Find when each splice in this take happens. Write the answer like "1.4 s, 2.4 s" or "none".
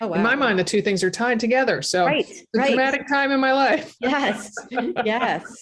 4.0 s